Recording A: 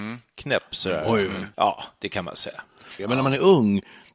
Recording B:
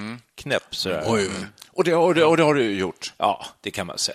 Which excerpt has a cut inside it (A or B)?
A